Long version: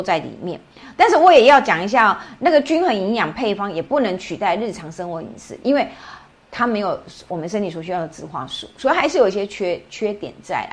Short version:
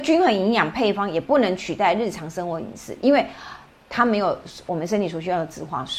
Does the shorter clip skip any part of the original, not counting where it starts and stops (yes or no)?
no